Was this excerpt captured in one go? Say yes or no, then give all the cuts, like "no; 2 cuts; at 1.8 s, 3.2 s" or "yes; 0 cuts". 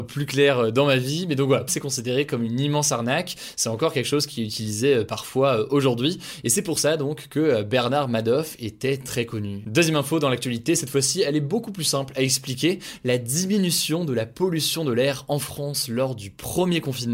no; 1 cut; at 1.7 s